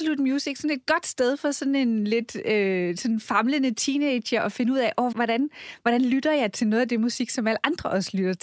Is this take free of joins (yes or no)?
no